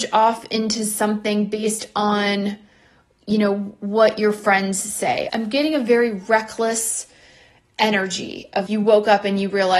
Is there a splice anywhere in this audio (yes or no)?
yes